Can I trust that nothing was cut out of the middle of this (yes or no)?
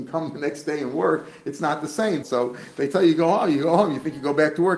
no